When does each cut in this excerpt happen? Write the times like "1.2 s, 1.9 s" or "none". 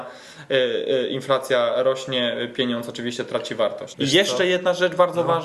3.9 s